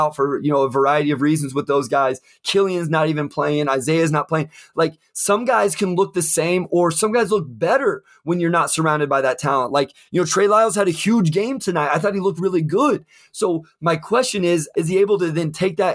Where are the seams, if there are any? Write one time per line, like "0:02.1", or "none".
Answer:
0:12.4
0:14.7